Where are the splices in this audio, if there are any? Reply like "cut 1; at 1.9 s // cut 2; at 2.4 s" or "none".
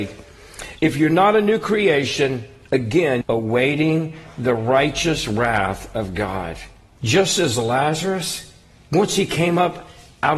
cut 1; at 3.2 s // cut 2; at 7.0 s